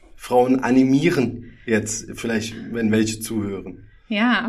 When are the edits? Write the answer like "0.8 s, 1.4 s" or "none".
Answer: none